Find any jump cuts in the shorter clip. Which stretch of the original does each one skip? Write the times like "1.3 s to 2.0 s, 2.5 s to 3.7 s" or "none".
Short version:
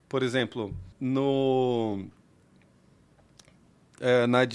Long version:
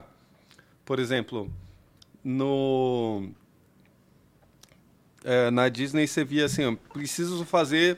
1.7 s to 2.2 s